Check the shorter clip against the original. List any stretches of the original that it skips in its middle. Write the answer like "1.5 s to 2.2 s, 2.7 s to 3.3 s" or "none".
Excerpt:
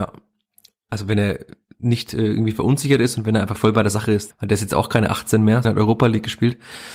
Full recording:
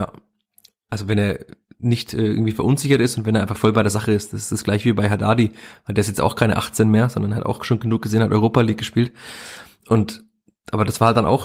4.3 s to 5.8 s, 7.1 s to 8.2 s